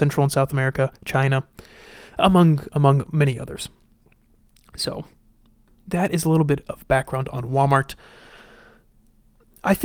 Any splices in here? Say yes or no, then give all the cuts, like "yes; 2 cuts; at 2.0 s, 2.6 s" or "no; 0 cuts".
no; 0 cuts